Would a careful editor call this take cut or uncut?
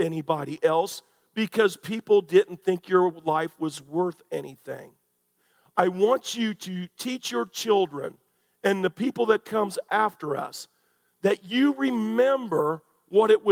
uncut